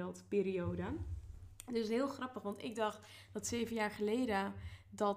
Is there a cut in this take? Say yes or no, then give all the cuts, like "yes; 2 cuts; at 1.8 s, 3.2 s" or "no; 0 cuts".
no; 0 cuts